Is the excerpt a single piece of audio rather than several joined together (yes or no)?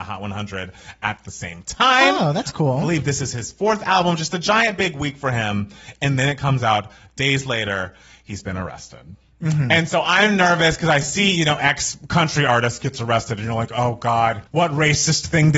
no